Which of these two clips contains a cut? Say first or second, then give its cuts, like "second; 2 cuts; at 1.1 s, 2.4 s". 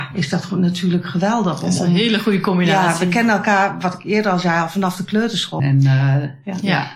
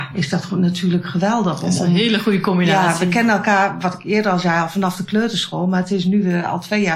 first; 1 cut; at 5.6 s